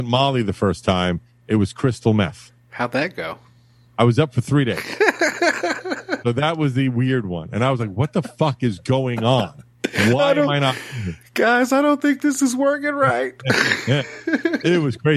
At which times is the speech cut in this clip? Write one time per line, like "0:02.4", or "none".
0:06.2